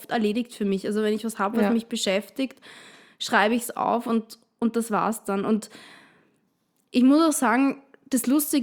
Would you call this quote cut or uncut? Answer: uncut